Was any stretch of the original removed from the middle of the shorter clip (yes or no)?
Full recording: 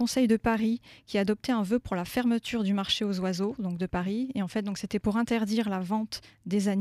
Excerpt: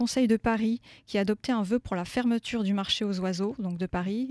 no